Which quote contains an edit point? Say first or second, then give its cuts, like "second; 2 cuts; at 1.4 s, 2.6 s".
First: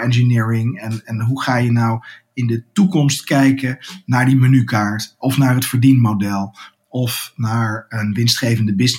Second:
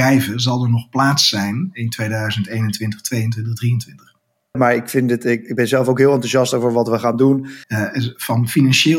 second; 2 cuts; at 4.5 s, 7.6 s